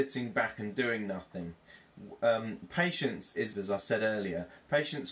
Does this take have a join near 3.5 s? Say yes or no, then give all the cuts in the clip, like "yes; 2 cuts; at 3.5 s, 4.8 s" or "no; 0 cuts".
yes; 1 cut; at 3.5 s